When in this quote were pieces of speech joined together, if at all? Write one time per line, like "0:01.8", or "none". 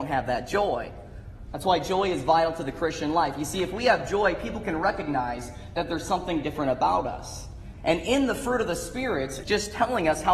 0:01.5
0:07.7
0:09.4